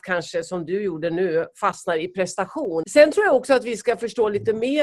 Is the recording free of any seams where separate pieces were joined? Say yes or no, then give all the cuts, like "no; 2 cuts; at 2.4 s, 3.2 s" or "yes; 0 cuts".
no; 1 cut; at 2.8 s